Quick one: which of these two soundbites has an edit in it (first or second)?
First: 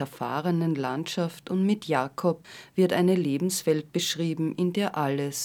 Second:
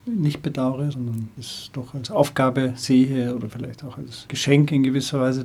second